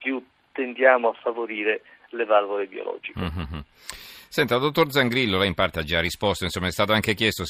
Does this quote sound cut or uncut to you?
uncut